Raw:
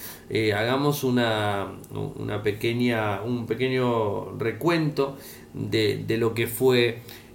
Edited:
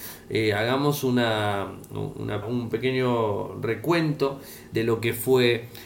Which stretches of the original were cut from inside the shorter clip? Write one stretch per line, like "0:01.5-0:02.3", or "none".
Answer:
0:02.4-0:03.2
0:05.5-0:06.1